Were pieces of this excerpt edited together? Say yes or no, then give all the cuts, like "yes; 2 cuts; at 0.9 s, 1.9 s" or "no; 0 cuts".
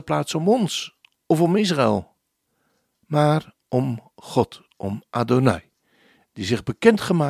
no; 0 cuts